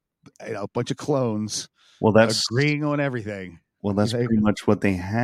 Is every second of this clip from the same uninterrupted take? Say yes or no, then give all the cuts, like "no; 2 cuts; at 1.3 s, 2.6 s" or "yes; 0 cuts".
yes; 0 cuts